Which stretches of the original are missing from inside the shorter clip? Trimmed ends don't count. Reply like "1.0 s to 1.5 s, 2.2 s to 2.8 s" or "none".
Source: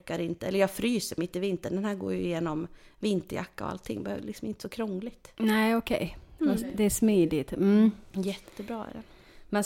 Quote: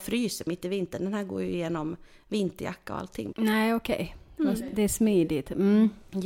4.0 s to 5.3 s